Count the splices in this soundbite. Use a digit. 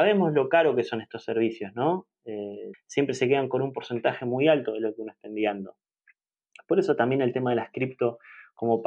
1